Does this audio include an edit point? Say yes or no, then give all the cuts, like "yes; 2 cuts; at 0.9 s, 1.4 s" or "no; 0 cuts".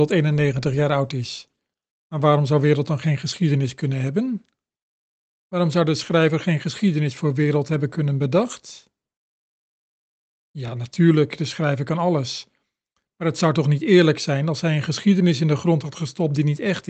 no; 0 cuts